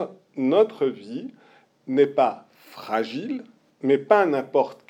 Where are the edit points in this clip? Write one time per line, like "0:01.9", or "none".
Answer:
0:03.7